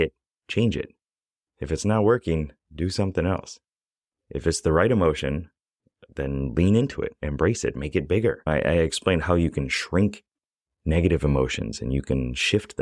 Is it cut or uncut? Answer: uncut